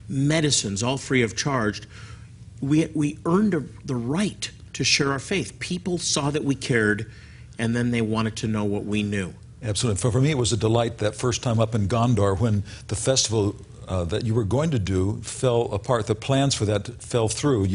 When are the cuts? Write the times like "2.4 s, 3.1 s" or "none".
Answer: none